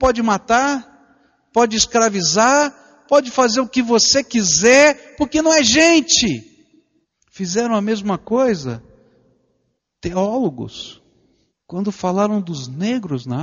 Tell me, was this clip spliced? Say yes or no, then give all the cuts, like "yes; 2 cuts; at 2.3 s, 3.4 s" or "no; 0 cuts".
no; 0 cuts